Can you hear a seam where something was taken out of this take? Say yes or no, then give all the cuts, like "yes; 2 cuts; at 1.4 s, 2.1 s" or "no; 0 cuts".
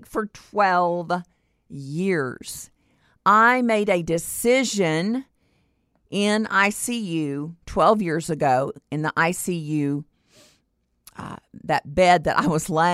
no; 0 cuts